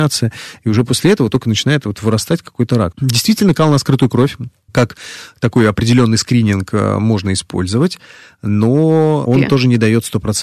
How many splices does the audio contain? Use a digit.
2